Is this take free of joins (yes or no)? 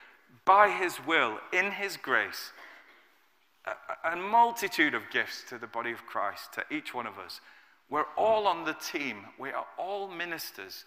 yes